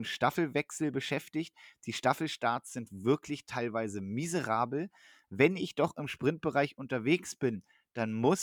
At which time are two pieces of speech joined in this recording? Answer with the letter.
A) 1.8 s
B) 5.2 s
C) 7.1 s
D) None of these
B